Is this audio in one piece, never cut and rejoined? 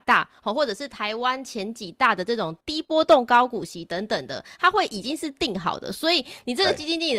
yes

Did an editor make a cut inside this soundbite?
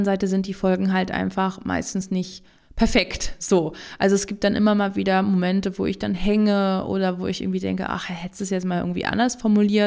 no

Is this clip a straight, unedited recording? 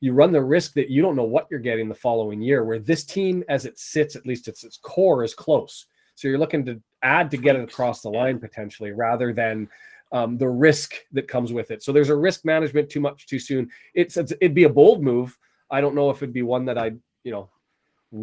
yes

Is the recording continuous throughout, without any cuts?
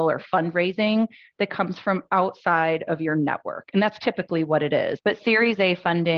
no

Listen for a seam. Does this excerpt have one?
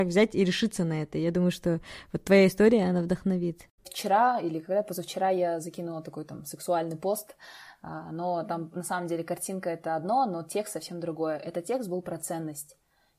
yes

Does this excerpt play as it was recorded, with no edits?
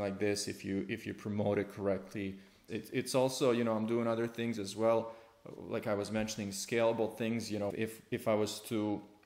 no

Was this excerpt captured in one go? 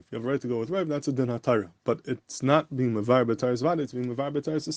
yes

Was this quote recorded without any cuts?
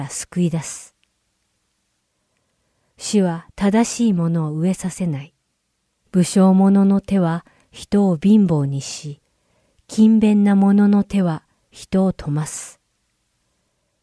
no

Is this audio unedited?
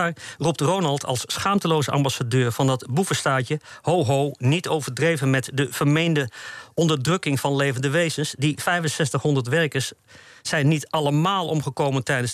yes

